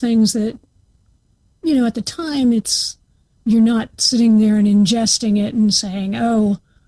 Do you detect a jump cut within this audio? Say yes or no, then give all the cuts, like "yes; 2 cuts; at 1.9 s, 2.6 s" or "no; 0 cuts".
no; 0 cuts